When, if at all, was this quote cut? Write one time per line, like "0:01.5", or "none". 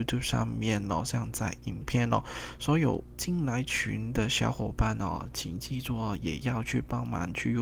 0:02.6